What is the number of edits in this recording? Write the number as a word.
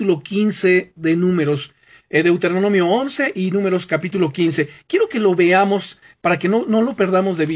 zero